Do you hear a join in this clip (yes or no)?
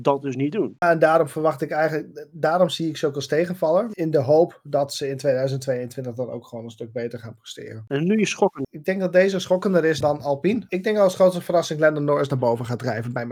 yes